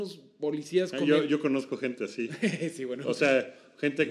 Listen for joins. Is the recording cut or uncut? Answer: uncut